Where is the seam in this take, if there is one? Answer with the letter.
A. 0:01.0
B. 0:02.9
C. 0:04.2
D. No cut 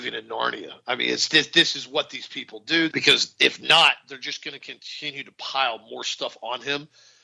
B